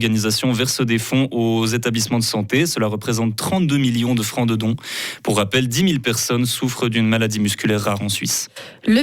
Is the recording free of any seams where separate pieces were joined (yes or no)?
yes